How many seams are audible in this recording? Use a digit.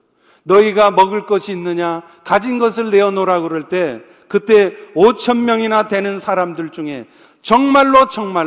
0